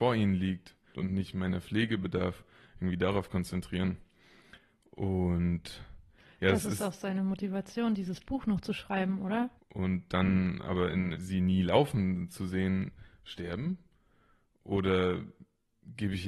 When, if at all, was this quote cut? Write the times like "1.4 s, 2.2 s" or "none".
0.9 s, 9.6 s, 11.1 s